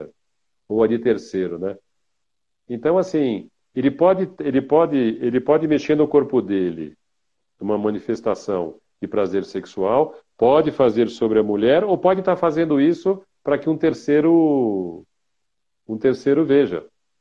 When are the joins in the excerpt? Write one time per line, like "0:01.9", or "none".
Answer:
none